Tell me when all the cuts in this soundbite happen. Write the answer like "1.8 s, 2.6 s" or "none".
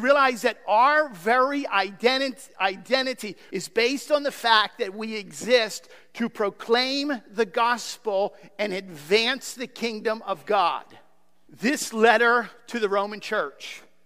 3.5 s, 11.5 s